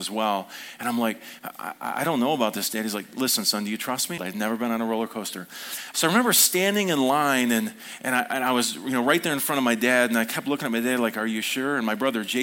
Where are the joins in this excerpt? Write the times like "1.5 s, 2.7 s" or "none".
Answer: 4.2 s, 5.9 s

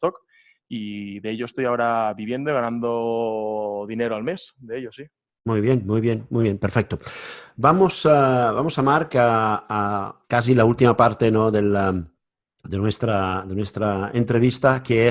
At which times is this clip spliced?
none

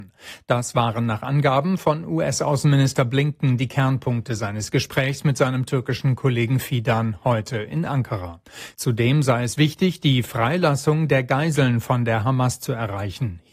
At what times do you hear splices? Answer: none

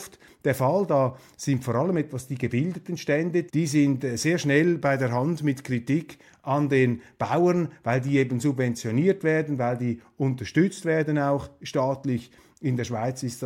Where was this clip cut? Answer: 3.5 s

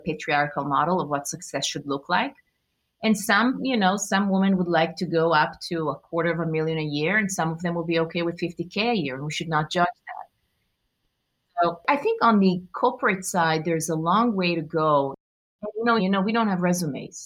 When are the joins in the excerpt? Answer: 16.0 s

